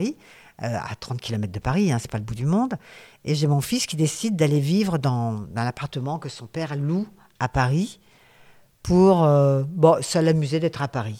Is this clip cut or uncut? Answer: uncut